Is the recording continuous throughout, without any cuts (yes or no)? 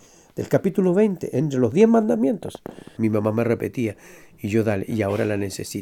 no